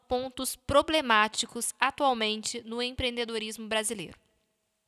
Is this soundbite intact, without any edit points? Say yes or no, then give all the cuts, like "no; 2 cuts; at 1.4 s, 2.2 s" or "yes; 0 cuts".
yes; 0 cuts